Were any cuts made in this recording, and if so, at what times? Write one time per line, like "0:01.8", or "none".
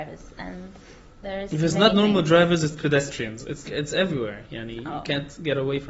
0:03.7